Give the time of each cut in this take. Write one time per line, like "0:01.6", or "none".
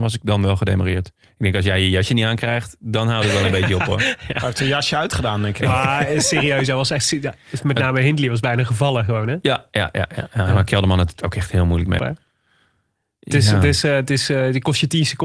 0:12.0

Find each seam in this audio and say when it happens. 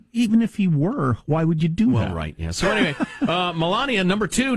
none

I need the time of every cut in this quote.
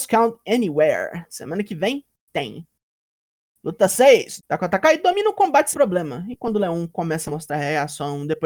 0:04.4
0:05.7

